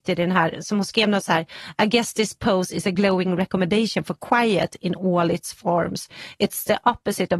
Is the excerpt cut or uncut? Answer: uncut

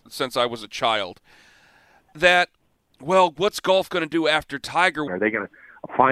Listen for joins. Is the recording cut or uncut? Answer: cut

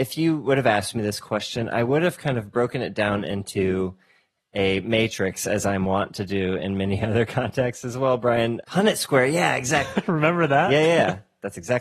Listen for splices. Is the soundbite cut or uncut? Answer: cut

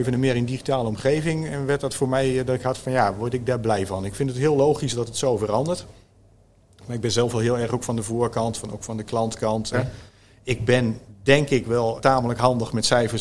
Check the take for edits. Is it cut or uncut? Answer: cut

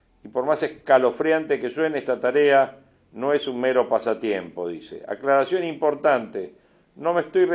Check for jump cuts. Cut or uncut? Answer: uncut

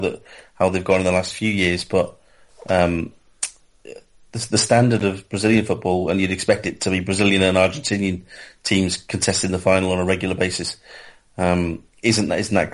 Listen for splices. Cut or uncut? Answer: uncut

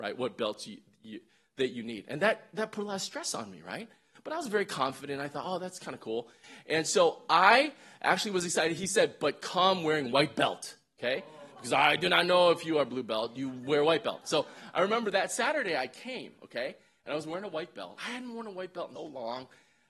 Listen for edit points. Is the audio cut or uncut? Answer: cut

